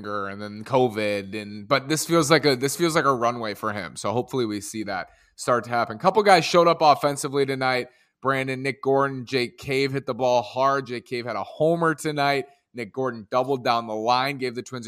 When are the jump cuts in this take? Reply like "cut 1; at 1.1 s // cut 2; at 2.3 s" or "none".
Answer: none